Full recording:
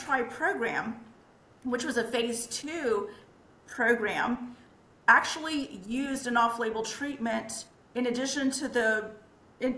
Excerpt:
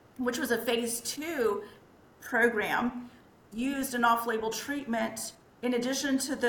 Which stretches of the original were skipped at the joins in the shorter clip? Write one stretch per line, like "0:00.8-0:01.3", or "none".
0:05.0-0:05.8